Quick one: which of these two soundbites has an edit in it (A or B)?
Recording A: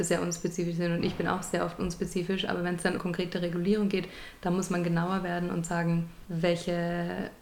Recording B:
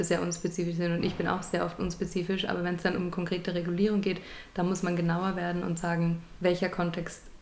A